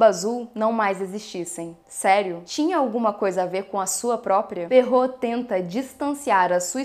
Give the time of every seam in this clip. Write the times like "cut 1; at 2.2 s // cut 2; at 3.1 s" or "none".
cut 1; at 2.5 s // cut 2; at 4.7 s